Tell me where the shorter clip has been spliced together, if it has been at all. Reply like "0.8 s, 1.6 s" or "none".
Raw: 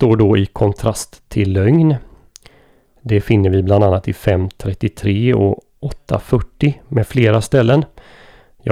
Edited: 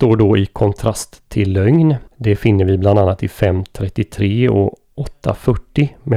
2.1 s